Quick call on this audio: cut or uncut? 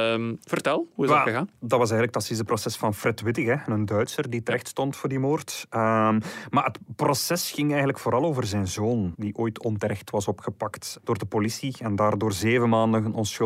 cut